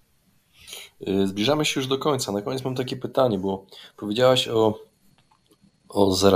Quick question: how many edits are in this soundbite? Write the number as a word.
zero